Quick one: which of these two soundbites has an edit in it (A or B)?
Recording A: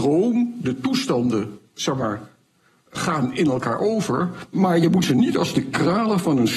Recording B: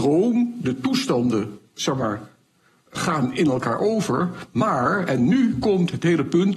A